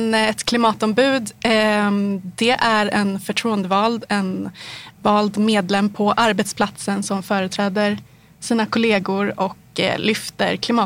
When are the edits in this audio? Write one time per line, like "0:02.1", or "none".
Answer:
none